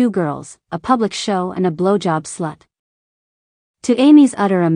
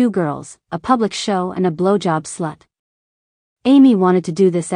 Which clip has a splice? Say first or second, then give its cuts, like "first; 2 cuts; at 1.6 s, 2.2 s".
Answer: second; 1 cut; at 3.5 s